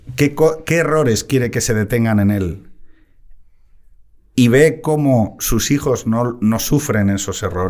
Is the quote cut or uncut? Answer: uncut